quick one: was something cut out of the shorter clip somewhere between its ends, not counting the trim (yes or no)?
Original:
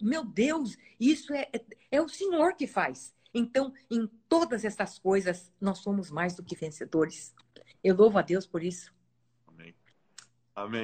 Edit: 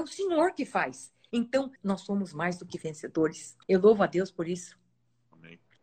yes